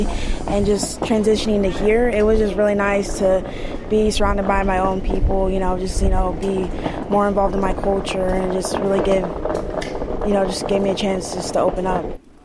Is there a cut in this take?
no; 0 cuts

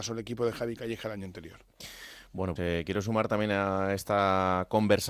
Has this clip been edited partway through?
yes; 1 cut; at 2.6 s

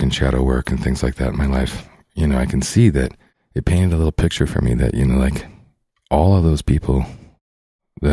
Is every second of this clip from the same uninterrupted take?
yes; 0 cuts

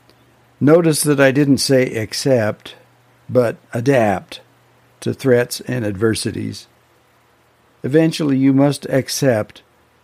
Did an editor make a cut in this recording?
no; 0 cuts

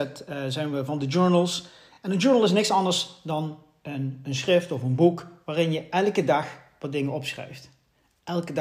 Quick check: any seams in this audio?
no; 0 cuts

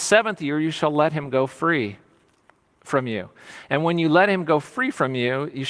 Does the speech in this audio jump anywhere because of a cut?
no; 0 cuts

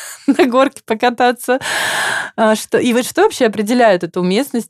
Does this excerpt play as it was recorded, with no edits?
yes; 0 cuts

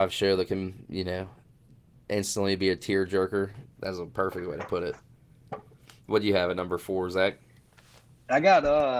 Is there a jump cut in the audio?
yes; 1 cut; at 3.6 s

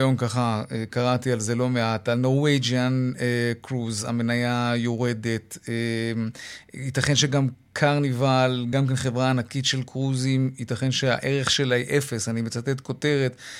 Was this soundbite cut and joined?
no; 0 cuts

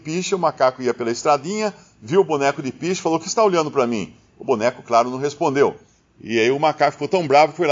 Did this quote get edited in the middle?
no; 0 cuts

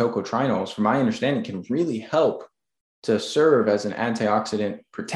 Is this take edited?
no; 0 cuts

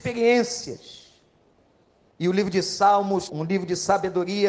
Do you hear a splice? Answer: yes; 2 cuts; at 2.1 s, 3.3 s

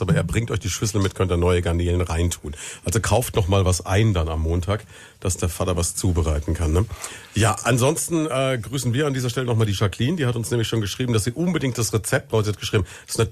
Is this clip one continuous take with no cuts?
yes; 0 cuts

